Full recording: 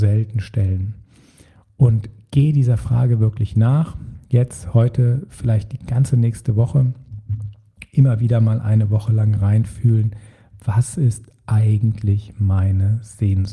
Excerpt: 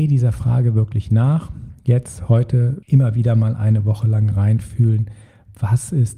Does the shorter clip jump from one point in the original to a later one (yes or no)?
yes